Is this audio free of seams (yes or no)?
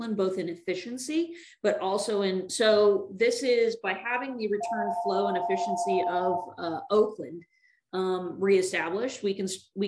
no